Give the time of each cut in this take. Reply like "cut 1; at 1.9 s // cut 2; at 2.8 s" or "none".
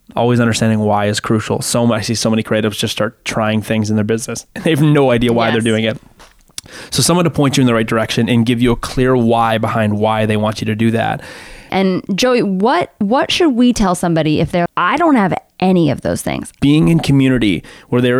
cut 1; at 11.7 s // cut 2; at 14.7 s // cut 3; at 16.6 s